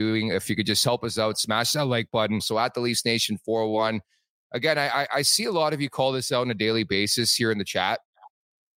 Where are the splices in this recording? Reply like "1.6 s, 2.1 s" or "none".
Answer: 2.4 s